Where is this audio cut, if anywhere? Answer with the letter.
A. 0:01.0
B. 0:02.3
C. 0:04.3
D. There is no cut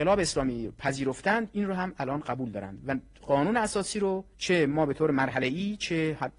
C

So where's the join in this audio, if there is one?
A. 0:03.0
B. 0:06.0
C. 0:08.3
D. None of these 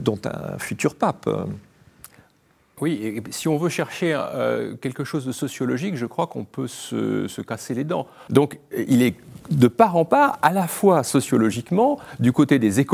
C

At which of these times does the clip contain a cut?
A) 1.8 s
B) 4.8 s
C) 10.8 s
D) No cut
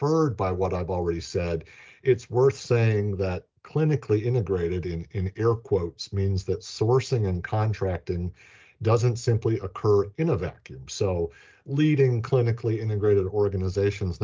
D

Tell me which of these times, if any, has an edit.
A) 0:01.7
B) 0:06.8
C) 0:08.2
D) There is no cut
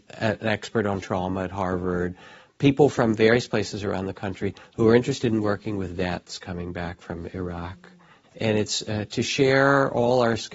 C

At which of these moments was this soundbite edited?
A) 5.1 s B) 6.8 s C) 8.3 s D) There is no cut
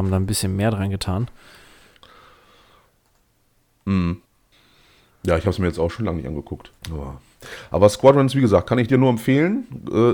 B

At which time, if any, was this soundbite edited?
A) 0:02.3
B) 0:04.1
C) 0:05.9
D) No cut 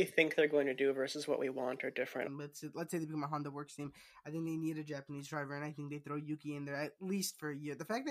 A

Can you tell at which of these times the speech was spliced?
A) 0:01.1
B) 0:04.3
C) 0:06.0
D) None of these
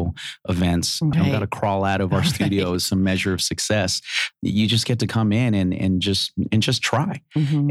A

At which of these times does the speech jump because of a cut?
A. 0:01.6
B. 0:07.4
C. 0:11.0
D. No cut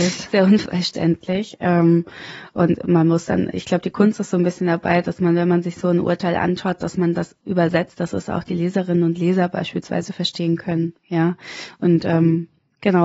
B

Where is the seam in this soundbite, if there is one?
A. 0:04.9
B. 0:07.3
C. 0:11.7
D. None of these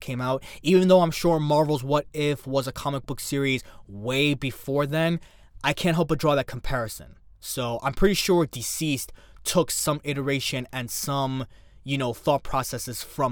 D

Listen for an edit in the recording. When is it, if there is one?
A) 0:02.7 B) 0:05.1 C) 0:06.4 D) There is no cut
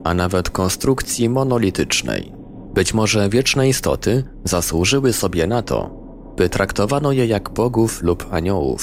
A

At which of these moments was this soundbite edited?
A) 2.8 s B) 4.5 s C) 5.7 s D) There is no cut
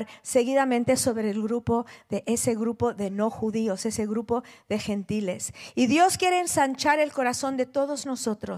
D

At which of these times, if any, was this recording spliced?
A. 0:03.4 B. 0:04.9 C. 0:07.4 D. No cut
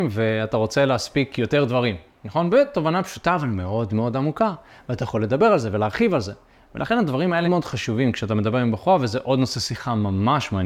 C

